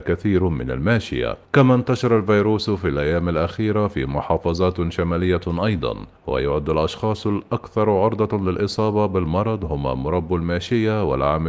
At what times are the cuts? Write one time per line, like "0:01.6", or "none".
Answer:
0:01.4
0:06.2